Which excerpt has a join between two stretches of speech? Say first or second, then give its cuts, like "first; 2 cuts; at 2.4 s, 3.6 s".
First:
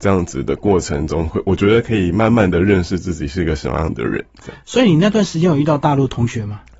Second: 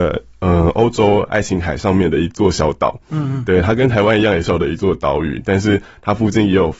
second; 1 cut; at 4.5 s